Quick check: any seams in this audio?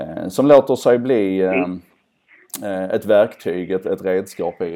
no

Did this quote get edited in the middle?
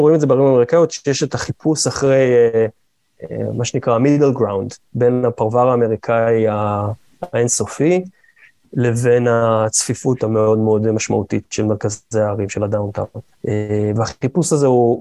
no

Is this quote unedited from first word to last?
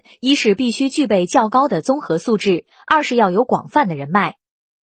yes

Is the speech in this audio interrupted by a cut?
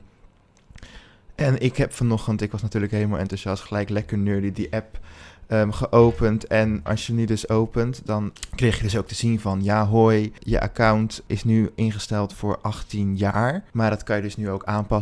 yes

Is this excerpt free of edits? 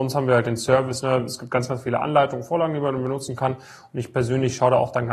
yes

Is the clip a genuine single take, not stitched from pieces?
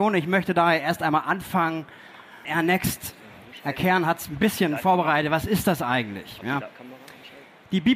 no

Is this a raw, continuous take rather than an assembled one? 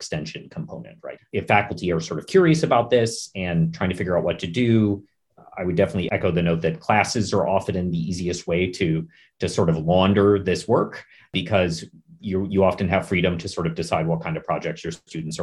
no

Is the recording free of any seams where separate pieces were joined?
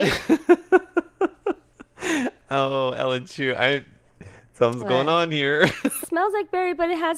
no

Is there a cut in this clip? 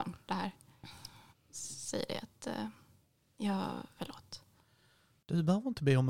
yes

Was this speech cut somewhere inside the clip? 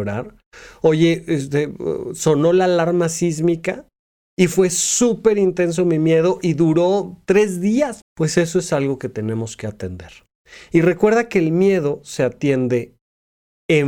yes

